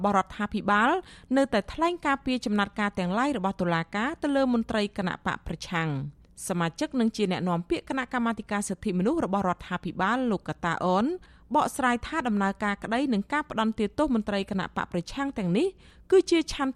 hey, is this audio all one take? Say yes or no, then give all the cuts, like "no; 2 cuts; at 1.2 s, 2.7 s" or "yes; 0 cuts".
yes; 0 cuts